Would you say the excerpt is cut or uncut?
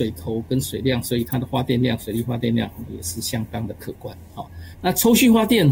cut